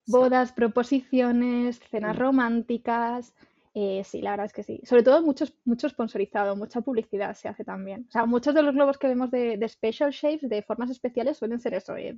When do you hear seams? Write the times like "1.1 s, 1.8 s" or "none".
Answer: none

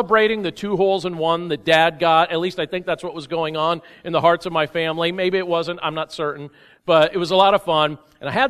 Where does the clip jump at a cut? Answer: none

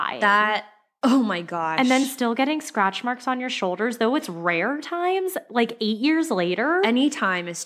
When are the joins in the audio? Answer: none

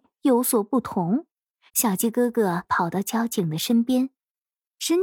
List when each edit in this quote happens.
1.7 s

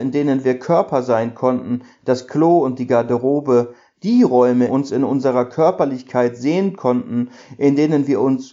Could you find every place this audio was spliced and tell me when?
4.7 s

